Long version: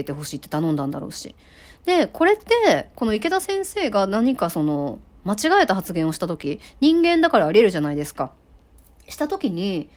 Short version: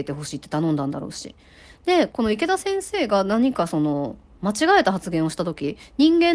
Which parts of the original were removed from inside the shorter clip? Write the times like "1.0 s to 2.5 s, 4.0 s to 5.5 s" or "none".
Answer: 2.1 s to 2.9 s

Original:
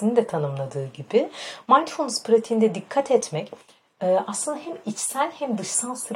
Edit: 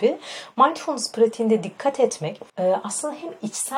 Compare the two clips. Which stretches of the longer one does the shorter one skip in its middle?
3.6 s to 3.9 s

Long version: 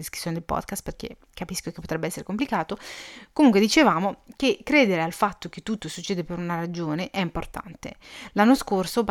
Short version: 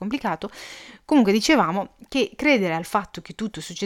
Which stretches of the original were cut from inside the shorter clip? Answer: none

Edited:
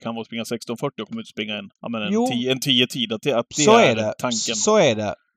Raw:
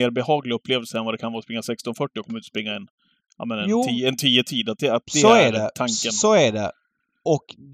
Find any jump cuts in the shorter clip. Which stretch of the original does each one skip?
2.9 s to 3.3 s

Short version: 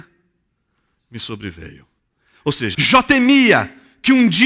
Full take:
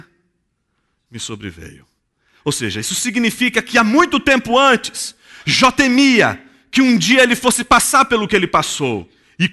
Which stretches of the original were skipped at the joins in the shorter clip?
2.7 s to 5.4 s

